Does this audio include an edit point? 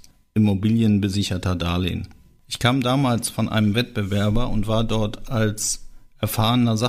yes; 1 cut; at 2.4 s

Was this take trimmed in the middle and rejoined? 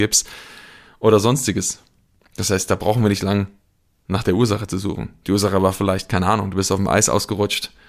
no; 0 cuts

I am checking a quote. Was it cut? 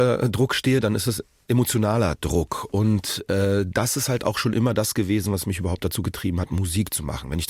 no; 0 cuts

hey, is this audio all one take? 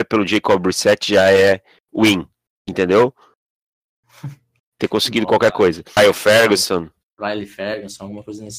no; 1 cut; at 6.0 s

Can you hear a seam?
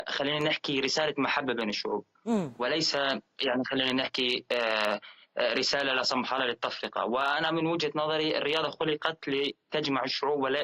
no; 0 cuts

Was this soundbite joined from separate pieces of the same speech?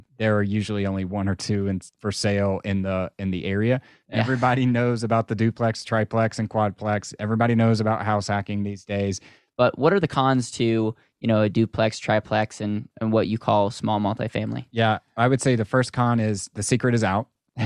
yes; 2 cuts; at 4.0 s, 9.5 s

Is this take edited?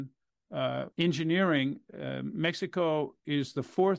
yes; 1 cut; at 0.9 s

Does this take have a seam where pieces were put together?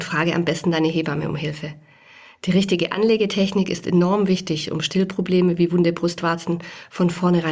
no; 0 cuts

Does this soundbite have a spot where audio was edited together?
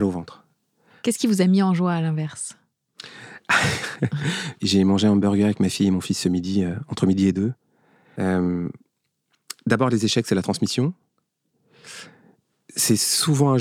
yes; 2 cuts; at 4.6 s, 8.2 s

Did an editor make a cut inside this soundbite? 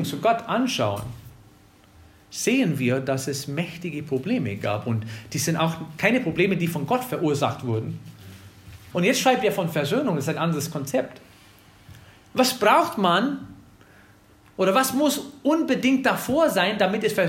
yes; 1 cut; at 8.9 s

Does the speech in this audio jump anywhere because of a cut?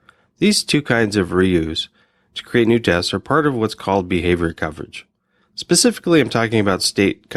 no; 0 cuts

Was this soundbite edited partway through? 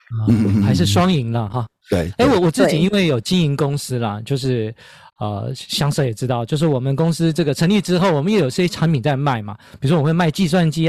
no; 0 cuts

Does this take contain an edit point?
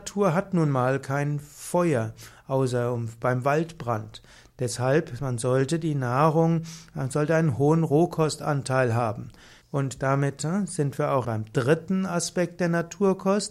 yes; 2 cuts; at 9.6 s, 11.2 s

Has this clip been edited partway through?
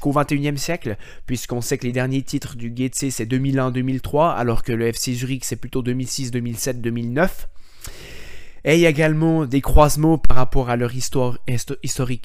no; 0 cuts

